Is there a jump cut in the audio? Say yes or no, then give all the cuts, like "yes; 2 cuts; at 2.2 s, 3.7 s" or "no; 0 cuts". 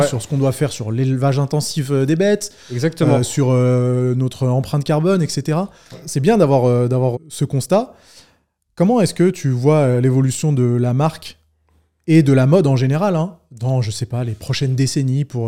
yes; 2 cuts; at 5.9 s, 7.1 s